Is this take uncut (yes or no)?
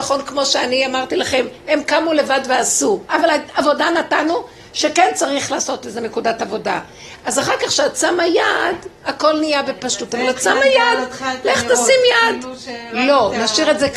yes